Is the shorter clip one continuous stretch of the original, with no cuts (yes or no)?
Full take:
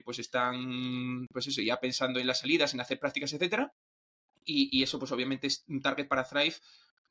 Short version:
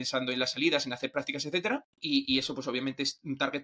no